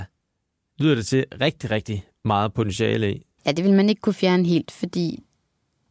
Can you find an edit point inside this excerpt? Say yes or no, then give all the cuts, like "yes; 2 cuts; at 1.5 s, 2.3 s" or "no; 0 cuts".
yes; 1 cut; at 3.4 s